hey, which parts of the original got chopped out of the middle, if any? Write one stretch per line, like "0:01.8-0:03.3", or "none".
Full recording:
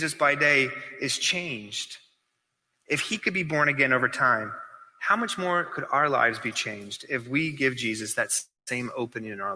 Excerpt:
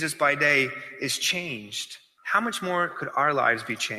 0:02.2-0:04.9